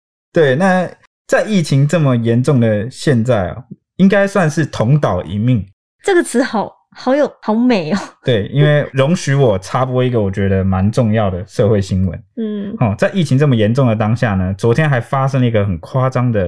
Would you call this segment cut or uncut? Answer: uncut